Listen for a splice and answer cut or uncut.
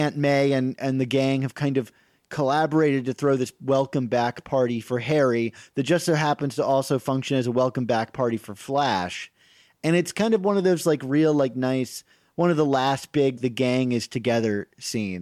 cut